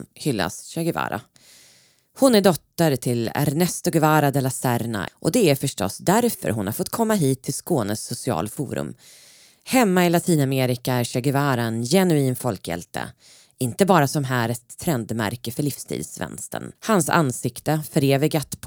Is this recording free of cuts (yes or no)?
no